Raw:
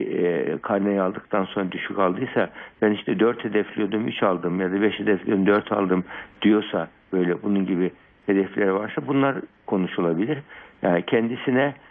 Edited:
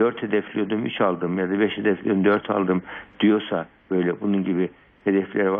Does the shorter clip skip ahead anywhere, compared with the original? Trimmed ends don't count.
no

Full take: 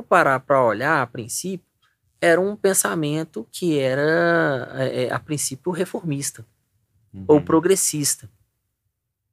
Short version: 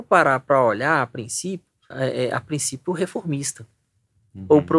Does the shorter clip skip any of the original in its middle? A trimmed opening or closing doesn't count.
yes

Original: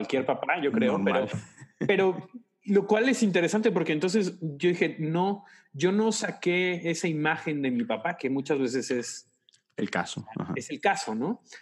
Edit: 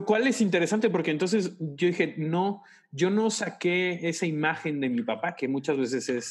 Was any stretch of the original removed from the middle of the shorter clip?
no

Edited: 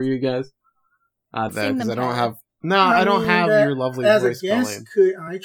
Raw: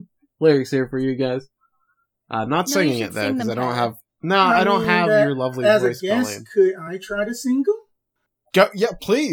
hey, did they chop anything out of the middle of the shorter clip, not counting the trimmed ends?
yes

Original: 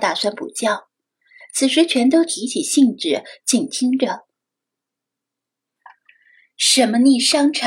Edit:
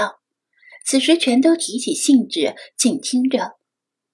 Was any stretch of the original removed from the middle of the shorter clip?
no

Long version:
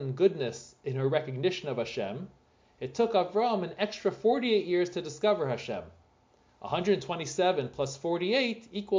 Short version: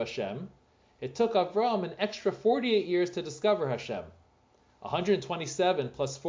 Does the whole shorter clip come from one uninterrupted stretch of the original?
yes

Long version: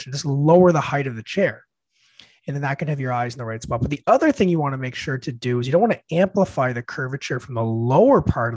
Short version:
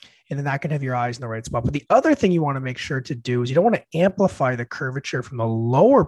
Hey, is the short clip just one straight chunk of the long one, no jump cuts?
yes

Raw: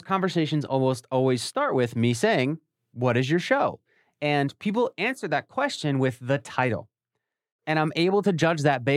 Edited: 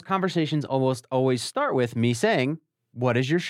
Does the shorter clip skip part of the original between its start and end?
no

